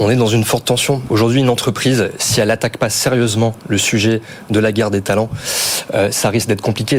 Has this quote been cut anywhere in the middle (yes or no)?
yes